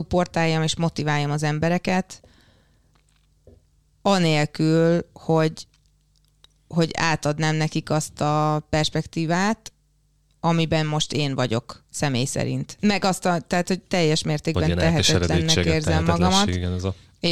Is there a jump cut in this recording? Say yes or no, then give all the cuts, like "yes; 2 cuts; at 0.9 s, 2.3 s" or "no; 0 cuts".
yes; 1 cut; at 12.8 s